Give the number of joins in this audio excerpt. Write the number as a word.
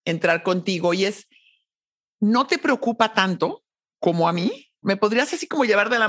one